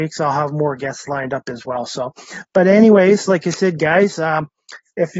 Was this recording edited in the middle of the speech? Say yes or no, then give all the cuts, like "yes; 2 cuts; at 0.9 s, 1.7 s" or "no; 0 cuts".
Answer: no; 0 cuts